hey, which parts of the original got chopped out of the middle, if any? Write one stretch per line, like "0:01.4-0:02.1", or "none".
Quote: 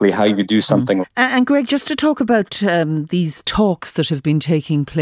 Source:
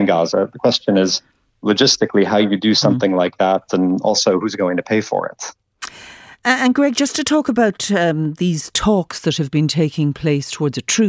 0:03.1-0:06.3